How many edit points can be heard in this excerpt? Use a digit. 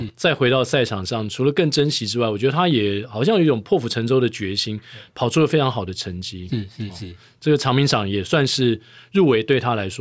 0